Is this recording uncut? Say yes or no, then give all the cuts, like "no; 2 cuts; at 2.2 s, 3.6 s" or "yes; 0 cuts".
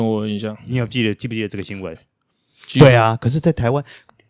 no; 1 cut; at 1.9 s